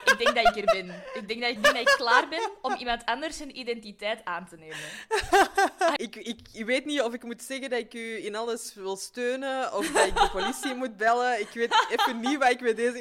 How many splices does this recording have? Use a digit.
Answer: 2